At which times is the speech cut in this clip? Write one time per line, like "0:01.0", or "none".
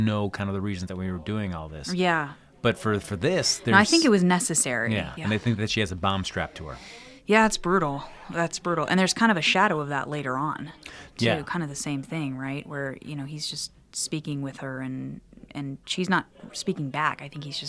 0:05.2